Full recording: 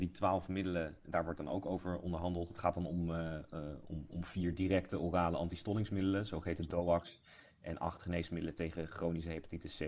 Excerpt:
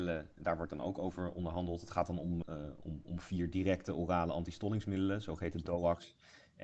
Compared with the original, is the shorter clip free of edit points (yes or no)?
no